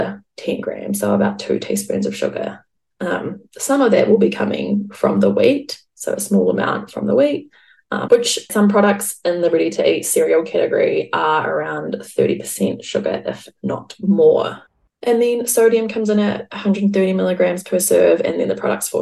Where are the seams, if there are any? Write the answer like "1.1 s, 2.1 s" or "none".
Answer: 8.1 s